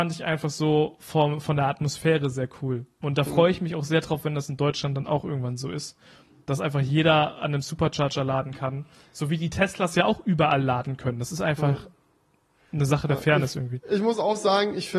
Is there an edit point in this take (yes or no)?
no